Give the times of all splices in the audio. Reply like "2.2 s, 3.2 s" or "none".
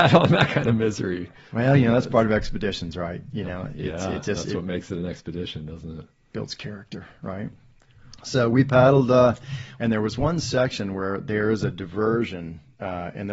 9.8 s